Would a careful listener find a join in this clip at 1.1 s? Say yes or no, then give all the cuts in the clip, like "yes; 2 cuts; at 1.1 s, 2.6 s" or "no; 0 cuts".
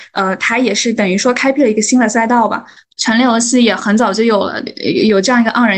no; 2 cuts; at 2.8 s, 4.7 s